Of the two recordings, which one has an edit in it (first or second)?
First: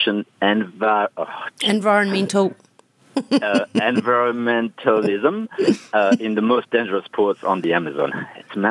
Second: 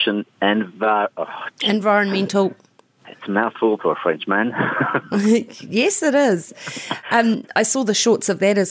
second